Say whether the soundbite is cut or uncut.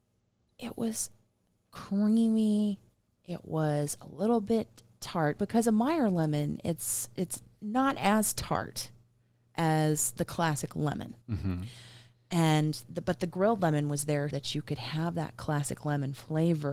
cut